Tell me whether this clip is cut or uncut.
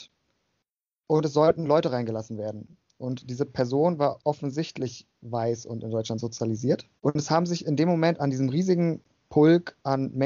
cut